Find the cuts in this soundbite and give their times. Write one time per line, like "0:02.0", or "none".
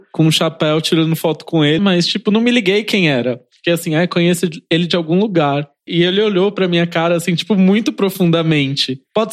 0:01.8
0:05.9